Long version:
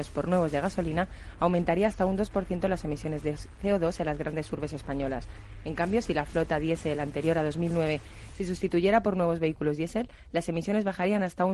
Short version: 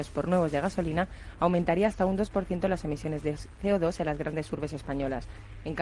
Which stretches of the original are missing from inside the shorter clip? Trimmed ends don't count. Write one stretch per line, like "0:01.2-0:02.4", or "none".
none